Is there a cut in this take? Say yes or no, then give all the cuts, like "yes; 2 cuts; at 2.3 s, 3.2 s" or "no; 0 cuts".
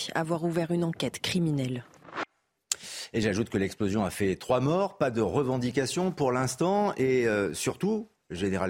no; 0 cuts